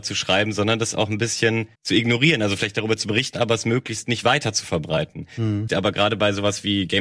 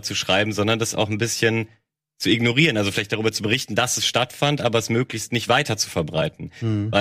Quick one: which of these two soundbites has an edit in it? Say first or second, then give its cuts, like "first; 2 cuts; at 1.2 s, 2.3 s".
first; 3 cuts; at 1.7 s, 3.3 s, 5.7 s